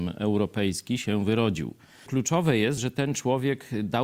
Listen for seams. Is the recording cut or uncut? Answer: uncut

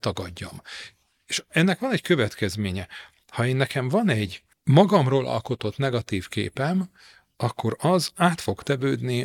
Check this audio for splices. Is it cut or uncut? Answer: uncut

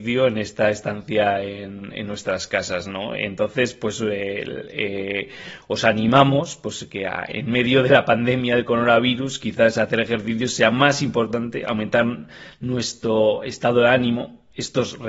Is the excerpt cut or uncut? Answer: uncut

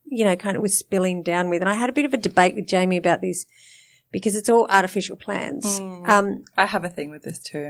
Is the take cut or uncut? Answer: uncut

